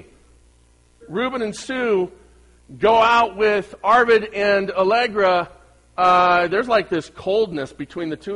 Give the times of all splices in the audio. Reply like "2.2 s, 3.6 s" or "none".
1.0 s